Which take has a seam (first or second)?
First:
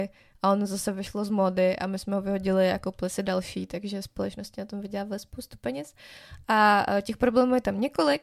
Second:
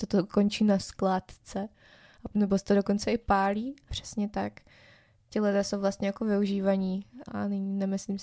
second